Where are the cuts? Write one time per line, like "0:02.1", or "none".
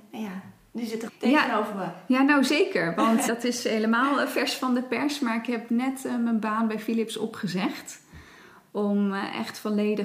0:01.1
0:03.3